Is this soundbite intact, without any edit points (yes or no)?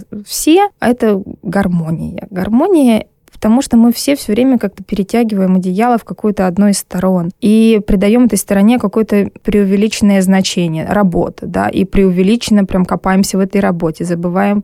yes